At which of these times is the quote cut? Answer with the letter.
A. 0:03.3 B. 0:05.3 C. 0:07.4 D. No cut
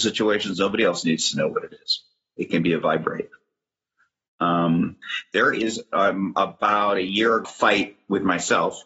C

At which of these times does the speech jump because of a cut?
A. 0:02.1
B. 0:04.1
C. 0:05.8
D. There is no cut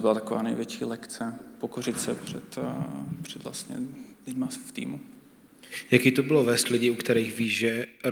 B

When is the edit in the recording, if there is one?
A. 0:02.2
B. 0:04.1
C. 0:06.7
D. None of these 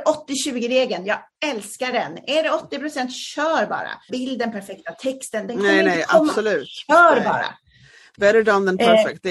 B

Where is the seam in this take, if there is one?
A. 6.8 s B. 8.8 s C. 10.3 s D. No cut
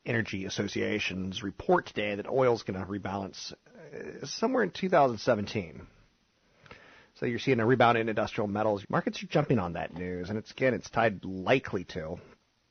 B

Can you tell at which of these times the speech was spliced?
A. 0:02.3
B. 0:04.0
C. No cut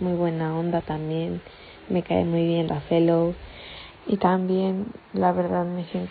B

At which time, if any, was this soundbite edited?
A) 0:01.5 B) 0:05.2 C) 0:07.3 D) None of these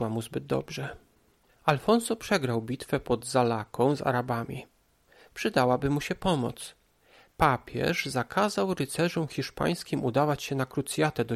A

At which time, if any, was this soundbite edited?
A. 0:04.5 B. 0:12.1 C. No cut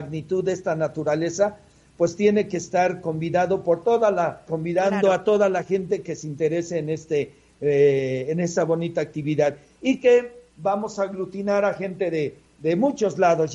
A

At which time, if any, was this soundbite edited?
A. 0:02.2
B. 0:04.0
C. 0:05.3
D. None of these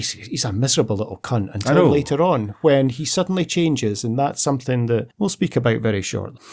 D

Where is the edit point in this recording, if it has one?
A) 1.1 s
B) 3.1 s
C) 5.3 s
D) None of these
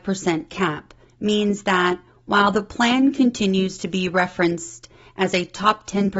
A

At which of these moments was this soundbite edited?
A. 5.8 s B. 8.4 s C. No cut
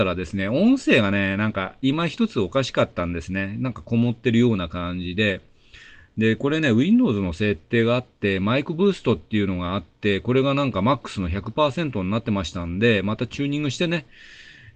C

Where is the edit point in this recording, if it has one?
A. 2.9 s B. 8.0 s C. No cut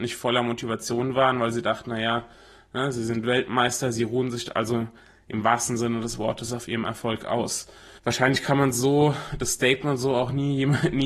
B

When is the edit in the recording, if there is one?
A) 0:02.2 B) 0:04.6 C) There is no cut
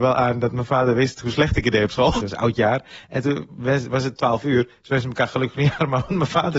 A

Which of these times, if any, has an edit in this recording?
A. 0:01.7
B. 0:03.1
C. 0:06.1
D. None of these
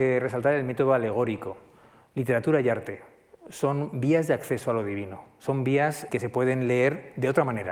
C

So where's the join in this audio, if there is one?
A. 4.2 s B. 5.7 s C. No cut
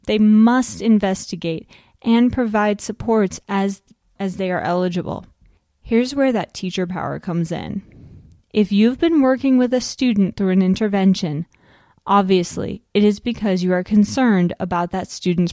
A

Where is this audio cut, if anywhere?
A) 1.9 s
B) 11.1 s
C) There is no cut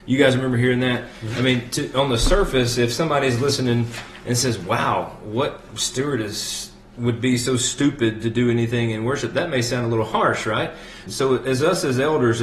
B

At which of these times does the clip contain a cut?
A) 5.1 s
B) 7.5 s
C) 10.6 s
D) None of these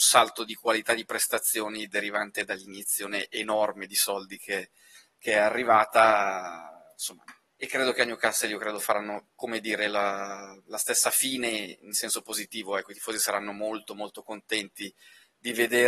B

